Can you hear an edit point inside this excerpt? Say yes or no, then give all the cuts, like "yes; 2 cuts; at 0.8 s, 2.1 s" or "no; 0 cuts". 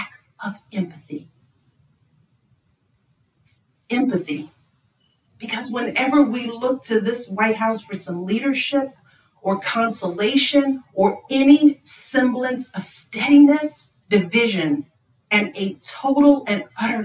yes; 2 cuts; at 5.3 s, 14.0 s